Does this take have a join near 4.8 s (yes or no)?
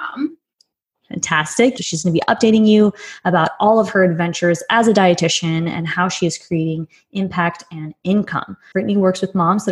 no